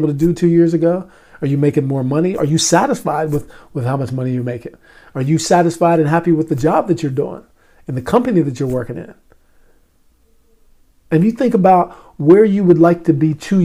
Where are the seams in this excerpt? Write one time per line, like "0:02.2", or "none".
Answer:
none